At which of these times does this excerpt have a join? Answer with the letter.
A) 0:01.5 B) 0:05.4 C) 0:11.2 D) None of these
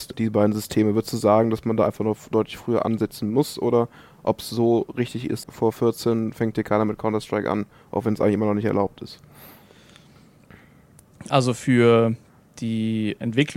B